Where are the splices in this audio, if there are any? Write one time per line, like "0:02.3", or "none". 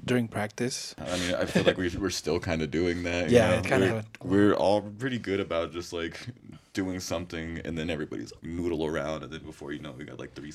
0:03.9